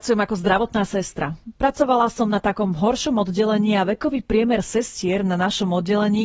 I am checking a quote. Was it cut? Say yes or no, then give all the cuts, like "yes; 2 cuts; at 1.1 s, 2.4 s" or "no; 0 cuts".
no; 0 cuts